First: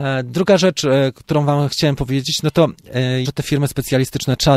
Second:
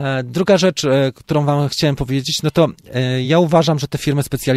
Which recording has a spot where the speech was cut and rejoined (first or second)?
first